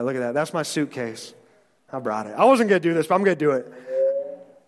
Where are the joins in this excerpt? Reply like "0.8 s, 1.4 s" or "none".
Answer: 1.9 s